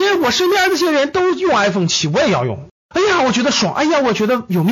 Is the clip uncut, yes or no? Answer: no